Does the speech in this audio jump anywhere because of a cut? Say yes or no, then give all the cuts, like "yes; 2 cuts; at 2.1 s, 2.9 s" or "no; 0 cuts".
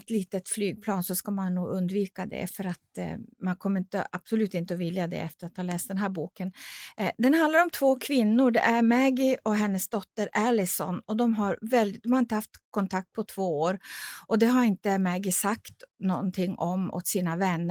yes; 1 cut; at 3.3 s